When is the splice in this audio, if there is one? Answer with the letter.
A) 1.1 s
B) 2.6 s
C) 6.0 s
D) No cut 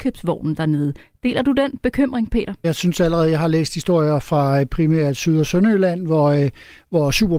B